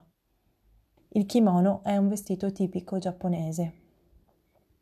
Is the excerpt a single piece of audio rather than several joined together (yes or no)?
no